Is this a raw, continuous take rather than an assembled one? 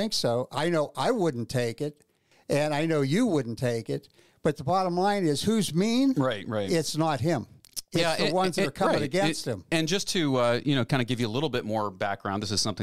yes; 0 cuts

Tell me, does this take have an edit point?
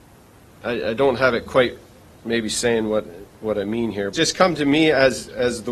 yes; 1 cut; at 4.1 s

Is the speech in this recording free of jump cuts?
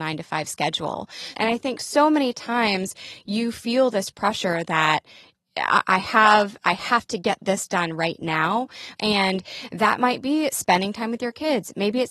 no; 2 cuts; at 1.3 s, 9.0 s

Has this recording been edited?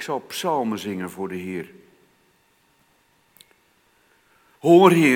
no; 0 cuts

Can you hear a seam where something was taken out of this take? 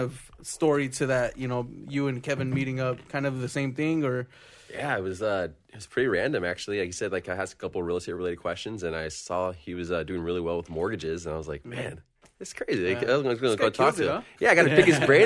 no; 0 cuts

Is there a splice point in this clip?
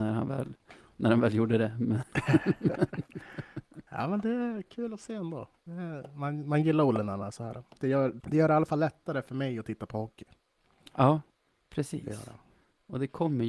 yes; 1 cut; at 8.2 s

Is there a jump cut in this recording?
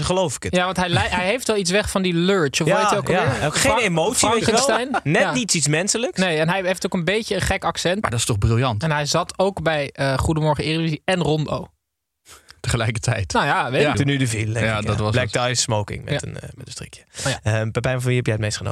yes; 2 cuts; at 8.0 s, 13.9 s

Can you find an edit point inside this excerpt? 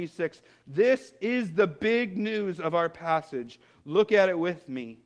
no; 0 cuts

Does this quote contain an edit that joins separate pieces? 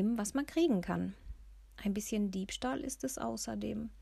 no; 0 cuts

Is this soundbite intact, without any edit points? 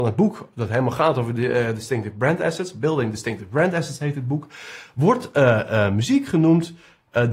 yes; 0 cuts

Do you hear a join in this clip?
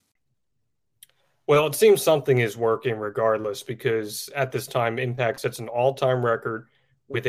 no; 0 cuts

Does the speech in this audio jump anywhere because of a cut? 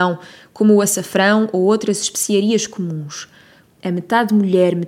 yes; 1 cut; at 3.6 s

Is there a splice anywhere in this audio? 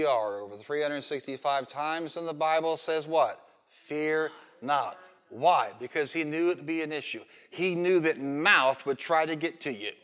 no; 0 cuts

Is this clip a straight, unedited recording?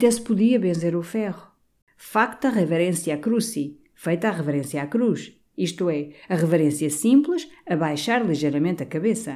no; 1 cut; at 1.8 s

